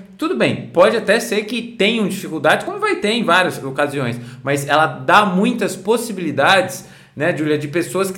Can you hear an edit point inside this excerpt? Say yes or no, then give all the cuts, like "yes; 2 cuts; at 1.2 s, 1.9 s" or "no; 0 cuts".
no; 0 cuts